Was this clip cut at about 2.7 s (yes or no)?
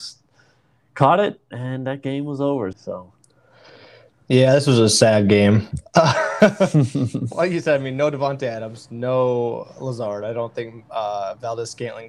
yes